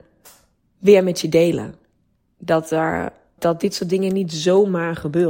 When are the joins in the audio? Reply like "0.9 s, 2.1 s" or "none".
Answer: 3.4 s